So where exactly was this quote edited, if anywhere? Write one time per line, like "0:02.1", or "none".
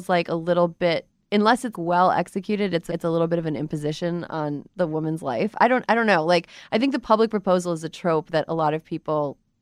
0:01.7
0:02.9